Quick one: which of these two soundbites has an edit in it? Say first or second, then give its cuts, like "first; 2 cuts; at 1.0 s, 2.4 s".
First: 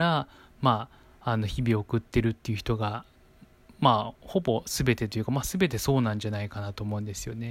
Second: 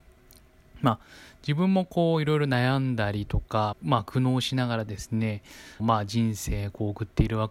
second; 2 cuts; at 3.7 s, 5.8 s